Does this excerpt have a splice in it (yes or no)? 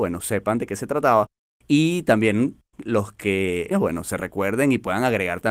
yes